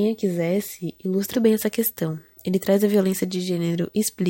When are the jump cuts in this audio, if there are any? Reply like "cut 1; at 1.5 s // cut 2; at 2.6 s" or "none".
cut 1; at 1.3 s